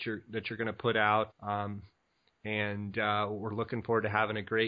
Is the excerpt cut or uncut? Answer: cut